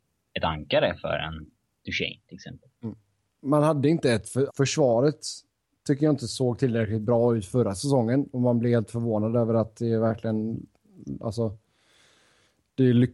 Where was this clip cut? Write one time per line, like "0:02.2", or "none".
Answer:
0:03.3
0:04.5